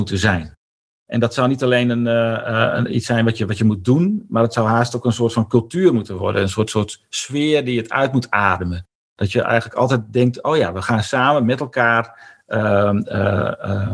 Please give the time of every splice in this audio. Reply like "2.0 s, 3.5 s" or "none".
none